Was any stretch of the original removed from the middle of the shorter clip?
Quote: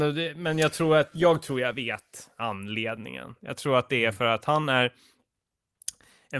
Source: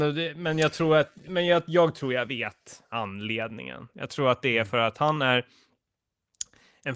yes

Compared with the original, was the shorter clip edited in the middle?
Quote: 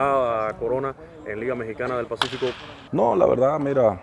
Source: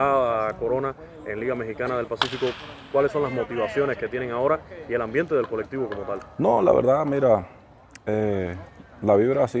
yes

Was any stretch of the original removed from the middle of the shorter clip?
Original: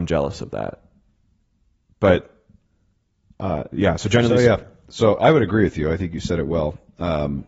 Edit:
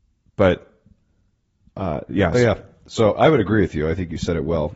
yes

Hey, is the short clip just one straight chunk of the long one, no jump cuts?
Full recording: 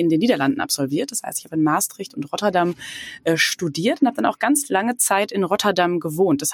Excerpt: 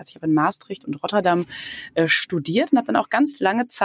yes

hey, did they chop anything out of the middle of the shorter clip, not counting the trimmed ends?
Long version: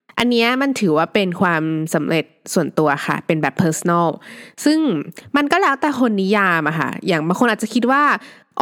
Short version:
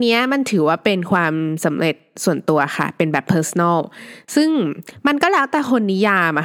no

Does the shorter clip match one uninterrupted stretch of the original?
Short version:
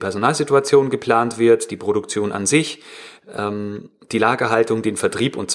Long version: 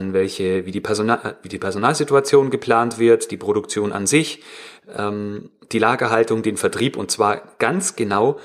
yes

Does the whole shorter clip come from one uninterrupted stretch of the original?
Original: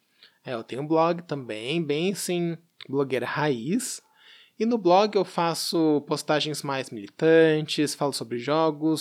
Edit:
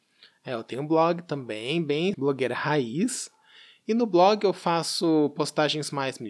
no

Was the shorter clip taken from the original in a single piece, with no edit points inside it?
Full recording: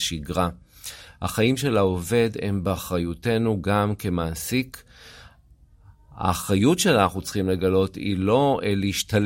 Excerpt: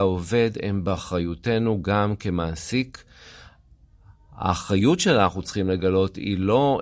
yes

